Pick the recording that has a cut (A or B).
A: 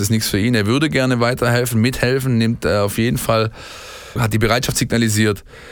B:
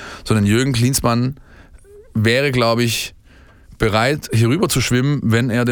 A